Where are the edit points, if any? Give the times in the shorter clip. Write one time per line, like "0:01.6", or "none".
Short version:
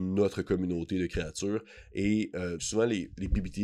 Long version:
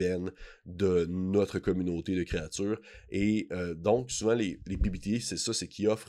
0:02.6